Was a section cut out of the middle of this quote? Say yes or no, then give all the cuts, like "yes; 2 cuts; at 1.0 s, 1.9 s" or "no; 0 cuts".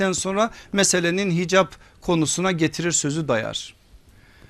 no; 0 cuts